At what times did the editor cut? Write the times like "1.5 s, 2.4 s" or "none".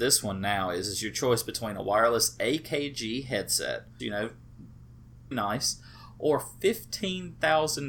4.0 s, 5.3 s